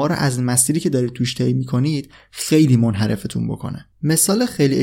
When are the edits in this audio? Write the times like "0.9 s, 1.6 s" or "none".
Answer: 3.9 s